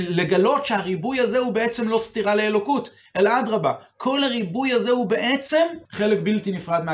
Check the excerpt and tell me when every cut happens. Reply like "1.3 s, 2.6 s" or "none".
5.8 s